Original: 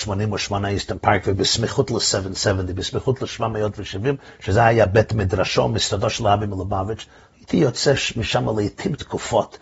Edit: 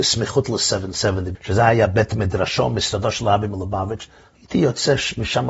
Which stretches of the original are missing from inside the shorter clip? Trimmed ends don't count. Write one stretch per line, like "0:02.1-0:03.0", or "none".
0:02.8-0:04.3

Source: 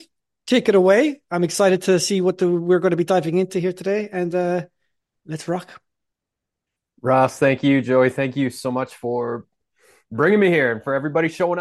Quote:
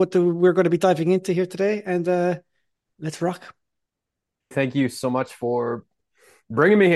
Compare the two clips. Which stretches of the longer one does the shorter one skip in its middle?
0:06.8-0:08.1

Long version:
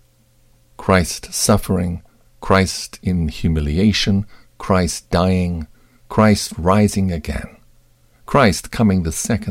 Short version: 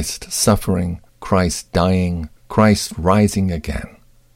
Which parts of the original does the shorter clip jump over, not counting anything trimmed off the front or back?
0:02.1-0:04.5
0:05.8-0:06.0

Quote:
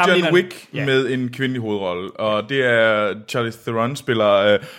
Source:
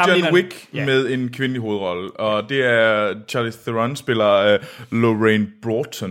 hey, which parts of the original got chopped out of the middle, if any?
none

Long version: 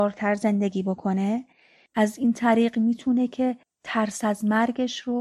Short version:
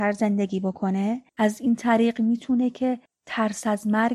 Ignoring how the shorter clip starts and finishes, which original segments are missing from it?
0:01.5-0:01.9

